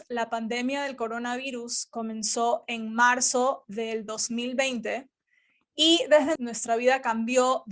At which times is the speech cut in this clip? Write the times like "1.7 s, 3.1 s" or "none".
6.4 s